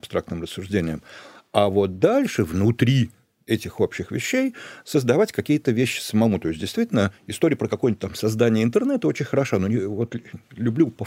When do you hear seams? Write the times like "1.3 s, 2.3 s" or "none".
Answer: none